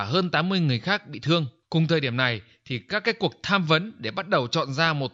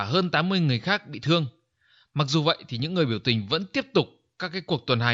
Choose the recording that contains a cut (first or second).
first